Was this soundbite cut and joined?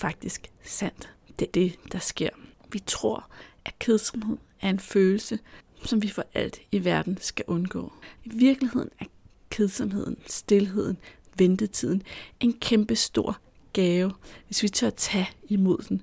yes; 2 cuts; at 1.5 s, 8.2 s

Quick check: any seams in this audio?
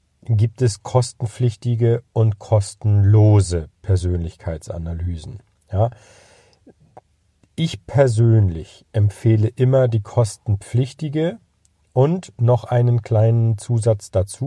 no; 0 cuts

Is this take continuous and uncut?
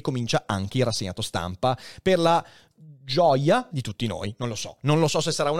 no; 1 cut; at 3.7 s

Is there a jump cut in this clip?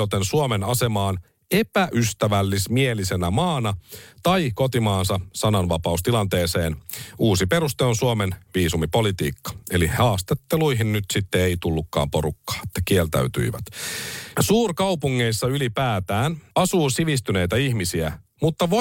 yes; 2 cuts; at 14.3 s, 16.5 s

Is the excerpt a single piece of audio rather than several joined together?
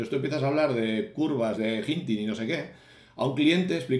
no; 1 cut; at 1.6 s

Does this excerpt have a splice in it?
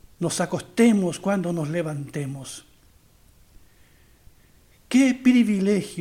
no; 0 cuts

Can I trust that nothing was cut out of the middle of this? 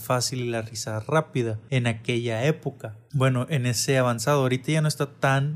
yes; 0 cuts

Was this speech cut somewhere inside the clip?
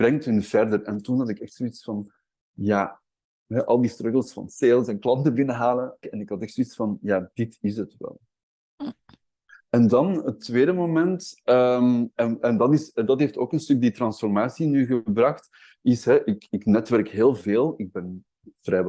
yes; 1 cut; at 6.0 s

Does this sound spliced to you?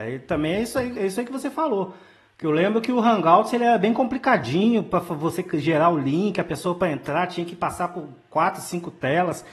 no; 0 cuts

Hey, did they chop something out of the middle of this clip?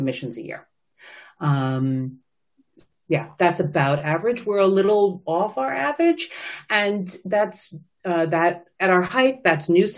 yes; 1 cut; at 2.9 s

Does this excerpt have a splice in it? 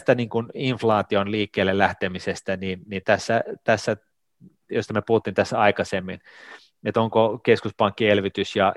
no; 0 cuts

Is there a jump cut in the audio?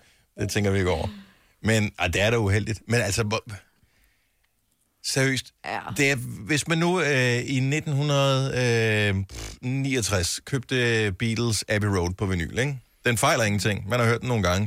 no; 0 cuts

